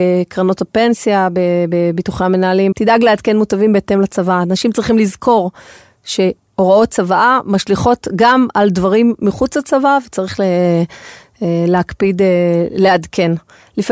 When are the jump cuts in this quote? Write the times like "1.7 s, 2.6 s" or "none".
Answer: 2.7 s

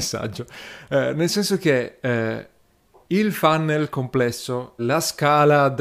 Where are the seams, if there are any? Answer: 4.8 s

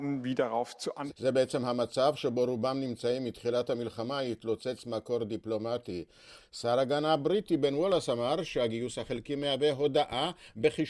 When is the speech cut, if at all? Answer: 1.1 s, 6.4 s

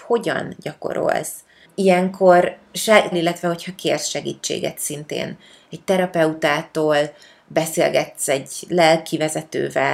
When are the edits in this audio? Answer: 1.6 s, 3.1 s

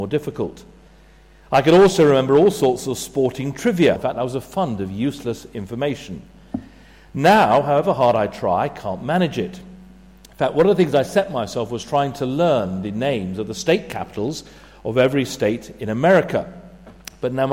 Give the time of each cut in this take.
4.0 s

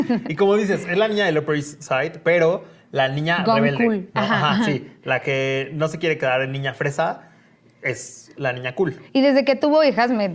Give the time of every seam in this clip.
none

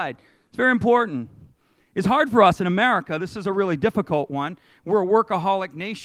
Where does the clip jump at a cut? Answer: none

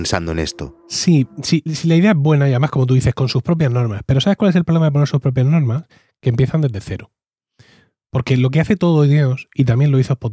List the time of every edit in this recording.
1.7 s

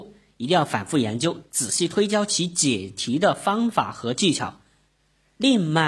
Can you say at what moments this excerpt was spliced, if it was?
none

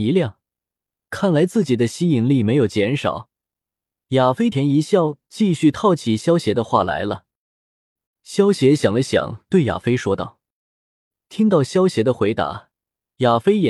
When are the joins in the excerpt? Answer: 4.5 s, 8.1 s

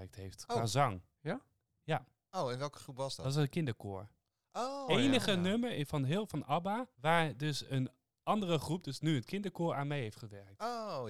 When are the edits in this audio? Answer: 4.9 s, 6.9 s

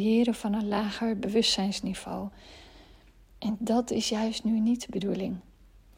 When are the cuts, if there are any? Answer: none

